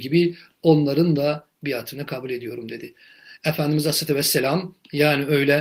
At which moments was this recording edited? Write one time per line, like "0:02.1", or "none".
0:03.4

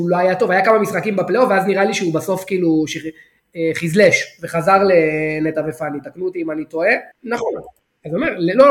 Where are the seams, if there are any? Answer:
0:07.1

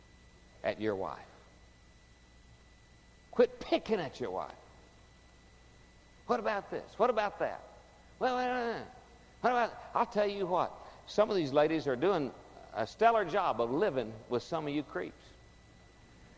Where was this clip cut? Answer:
none

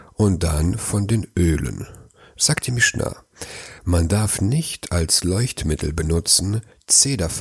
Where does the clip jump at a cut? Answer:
0:03.8

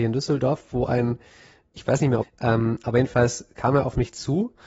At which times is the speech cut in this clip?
0:02.2

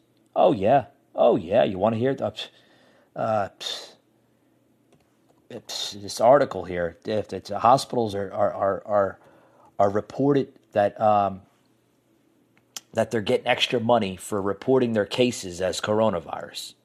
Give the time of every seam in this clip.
none

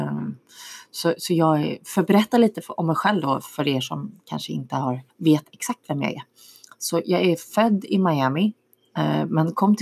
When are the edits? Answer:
0:05.1

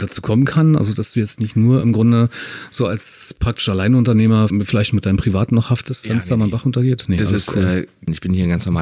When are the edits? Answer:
none

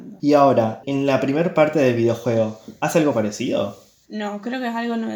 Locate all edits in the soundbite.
0:04.0

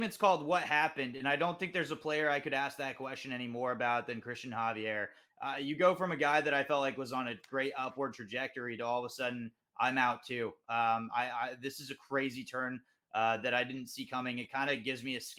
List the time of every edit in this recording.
none

